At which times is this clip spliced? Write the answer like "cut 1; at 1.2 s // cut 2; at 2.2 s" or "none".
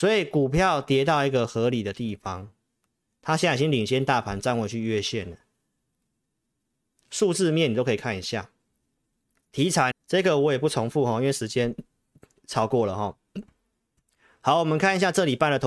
cut 1; at 9.9 s